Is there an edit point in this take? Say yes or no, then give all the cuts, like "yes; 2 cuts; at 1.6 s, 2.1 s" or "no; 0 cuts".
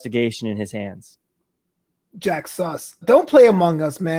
yes; 1 cut; at 3.0 s